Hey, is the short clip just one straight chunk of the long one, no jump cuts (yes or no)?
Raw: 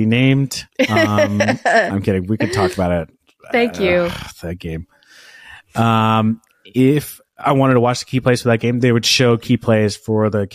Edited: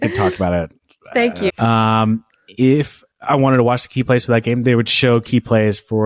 no